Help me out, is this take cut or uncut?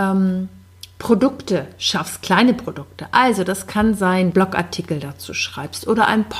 cut